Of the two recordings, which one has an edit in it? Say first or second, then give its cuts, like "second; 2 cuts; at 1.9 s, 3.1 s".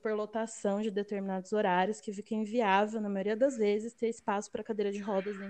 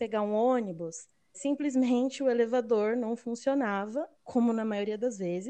second; 2 cuts; at 1.3 s, 4.1 s